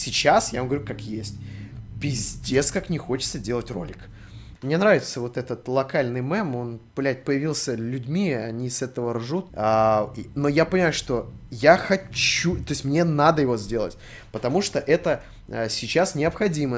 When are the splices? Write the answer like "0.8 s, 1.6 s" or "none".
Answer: 4.6 s, 9.5 s